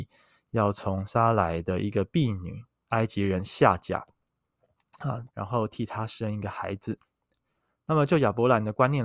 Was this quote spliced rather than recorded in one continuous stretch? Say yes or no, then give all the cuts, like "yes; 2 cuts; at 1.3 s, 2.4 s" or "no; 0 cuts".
yes; 1 cut; at 5.3 s